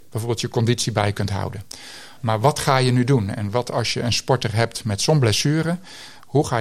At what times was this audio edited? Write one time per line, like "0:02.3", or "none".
0:02.2